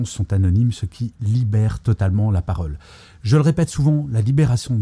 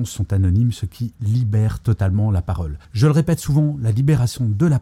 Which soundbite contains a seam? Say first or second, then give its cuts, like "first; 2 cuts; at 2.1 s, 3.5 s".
second; 1 cut; at 2.8 s